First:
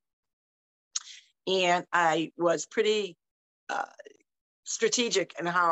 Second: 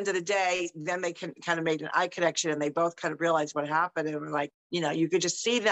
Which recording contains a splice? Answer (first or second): second